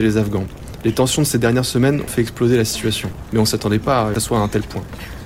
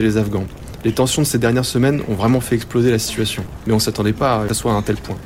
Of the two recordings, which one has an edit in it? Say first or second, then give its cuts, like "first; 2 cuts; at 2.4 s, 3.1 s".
first; 1 cut; at 2.1 s